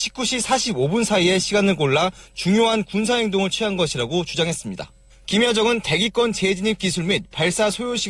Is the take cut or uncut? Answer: cut